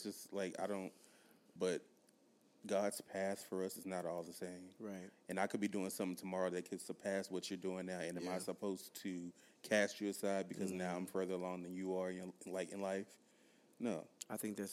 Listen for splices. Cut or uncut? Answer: cut